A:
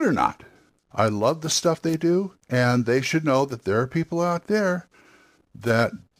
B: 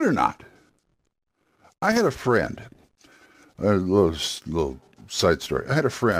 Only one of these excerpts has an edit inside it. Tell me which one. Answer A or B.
A